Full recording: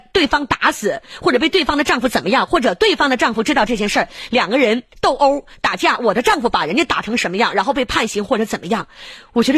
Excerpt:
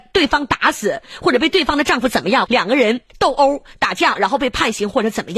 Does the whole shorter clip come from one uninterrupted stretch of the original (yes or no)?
no